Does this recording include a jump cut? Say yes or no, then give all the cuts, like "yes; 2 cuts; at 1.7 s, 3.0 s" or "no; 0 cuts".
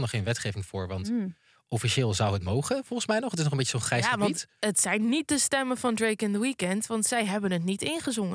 no; 0 cuts